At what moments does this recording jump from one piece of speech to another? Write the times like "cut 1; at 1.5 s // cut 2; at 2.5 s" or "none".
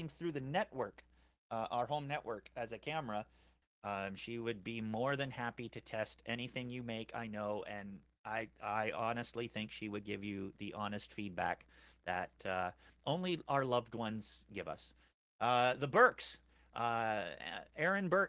cut 1; at 3.6 s